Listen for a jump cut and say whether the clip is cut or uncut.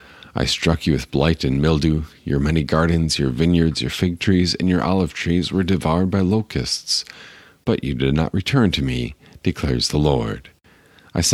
uncut